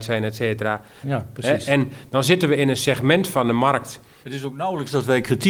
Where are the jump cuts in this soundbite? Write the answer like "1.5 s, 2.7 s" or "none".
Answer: 1.0 s, 4.2 s

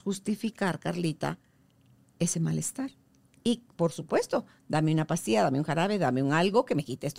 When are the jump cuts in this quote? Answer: none

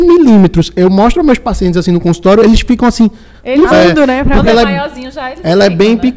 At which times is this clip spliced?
3.7 s

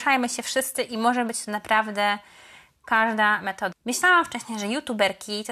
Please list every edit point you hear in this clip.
3.7 s

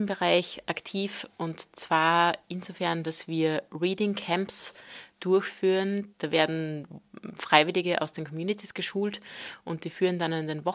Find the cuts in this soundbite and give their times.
none

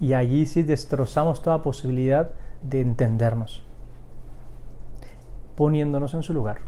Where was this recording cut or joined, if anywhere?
2.6 s, 5.5 s

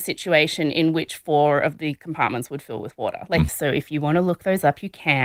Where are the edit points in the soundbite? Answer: 3.5 s

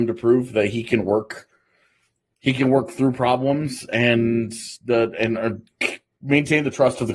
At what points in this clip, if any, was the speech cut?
none

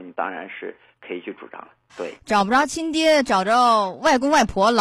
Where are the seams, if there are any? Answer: 1.9 s

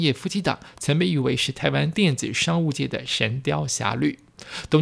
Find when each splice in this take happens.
none

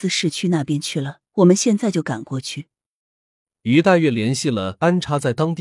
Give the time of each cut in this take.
1.3 s

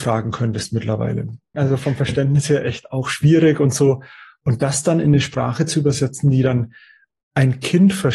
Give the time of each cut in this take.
1.5 s

